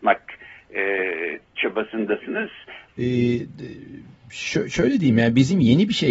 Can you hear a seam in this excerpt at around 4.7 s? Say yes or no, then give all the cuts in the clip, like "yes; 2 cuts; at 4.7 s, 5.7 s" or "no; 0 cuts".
no; 1 cut; at 2.9 s